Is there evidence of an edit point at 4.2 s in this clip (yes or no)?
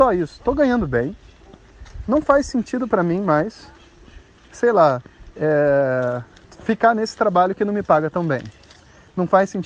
no